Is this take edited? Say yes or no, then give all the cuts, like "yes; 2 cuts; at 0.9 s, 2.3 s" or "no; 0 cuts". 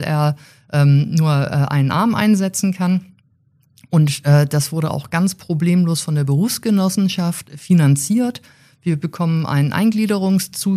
no; 0 cuts